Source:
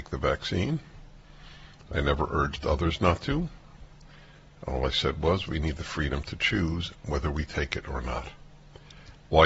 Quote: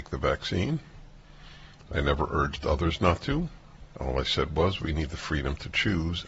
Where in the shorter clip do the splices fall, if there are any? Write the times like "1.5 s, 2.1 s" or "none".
3.9 s